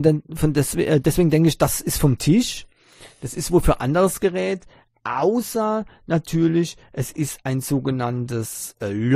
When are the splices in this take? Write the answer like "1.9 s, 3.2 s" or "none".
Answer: none